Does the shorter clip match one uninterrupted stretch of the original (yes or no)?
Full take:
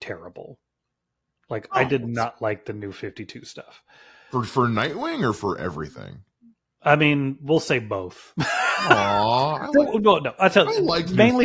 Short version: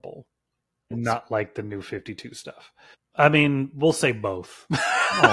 no